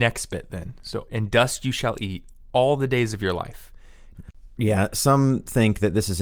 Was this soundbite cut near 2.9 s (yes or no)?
no